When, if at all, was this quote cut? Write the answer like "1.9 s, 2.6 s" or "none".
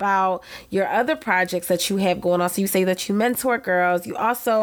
none